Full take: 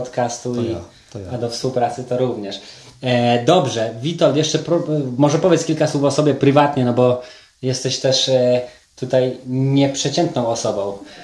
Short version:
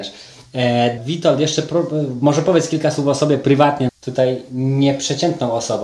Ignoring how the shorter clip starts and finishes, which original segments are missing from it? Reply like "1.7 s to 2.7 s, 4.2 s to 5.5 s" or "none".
3.5 s to 3.9 s, 6.8 s to 8.8 s